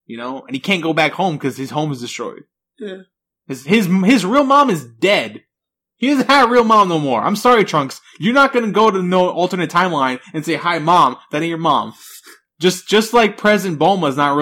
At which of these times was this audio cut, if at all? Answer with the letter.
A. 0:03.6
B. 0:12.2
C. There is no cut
C